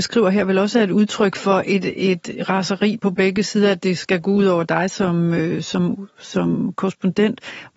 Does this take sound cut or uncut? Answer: uncut